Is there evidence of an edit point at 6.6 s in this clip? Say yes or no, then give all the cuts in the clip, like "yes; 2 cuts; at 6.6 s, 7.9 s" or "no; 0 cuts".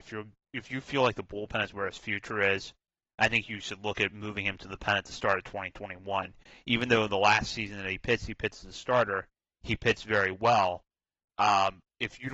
no; 0 cuts